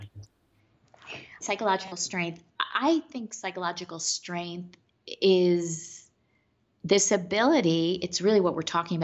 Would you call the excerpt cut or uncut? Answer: cut